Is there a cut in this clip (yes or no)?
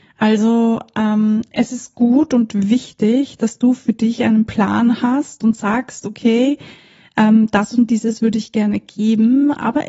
no